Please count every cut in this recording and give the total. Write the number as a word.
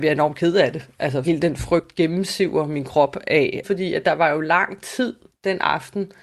two